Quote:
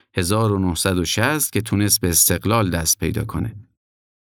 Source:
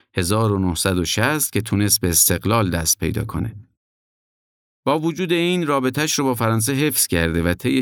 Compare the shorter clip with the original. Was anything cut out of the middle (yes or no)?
no